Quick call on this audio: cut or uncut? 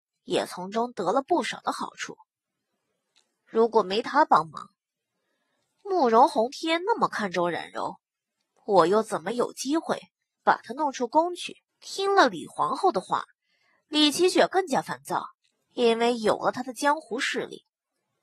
cut